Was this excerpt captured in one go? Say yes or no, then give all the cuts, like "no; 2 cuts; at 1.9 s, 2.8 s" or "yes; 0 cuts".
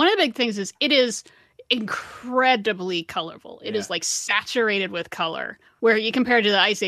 yes; 0 cuts